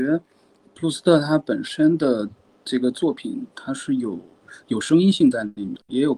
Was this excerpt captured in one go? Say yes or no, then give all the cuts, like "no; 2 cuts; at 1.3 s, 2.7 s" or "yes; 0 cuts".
no; 1 cut; at 4.6 s